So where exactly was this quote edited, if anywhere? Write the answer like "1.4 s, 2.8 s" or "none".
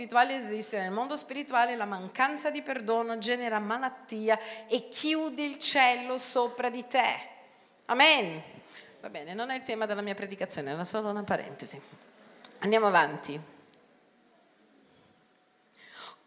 none